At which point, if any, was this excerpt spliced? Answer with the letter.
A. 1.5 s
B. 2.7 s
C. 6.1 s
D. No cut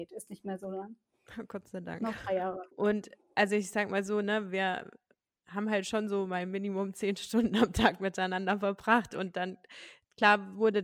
B